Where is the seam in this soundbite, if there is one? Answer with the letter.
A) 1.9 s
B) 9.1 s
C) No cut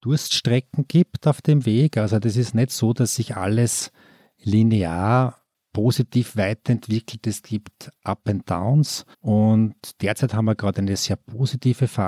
B